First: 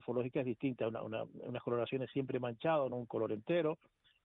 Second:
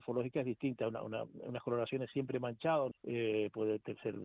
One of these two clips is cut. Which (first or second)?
second